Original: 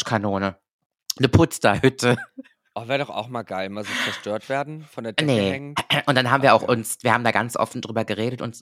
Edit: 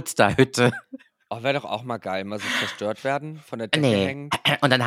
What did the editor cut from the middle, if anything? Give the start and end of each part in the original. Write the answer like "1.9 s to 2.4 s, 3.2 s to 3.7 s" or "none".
none